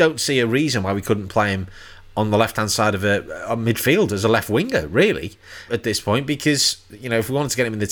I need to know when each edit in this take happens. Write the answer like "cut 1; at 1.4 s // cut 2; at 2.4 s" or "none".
cut 1; at 5.7 s